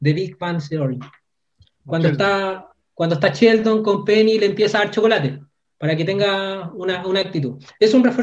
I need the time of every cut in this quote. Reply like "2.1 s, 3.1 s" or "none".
1.6 s